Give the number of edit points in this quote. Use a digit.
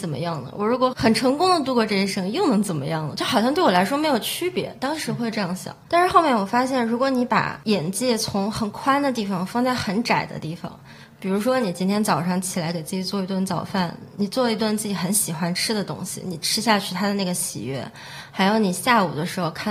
1